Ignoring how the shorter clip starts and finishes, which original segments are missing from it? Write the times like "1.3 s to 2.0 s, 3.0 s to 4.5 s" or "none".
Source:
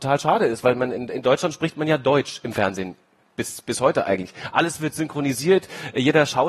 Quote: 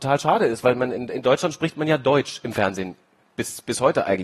none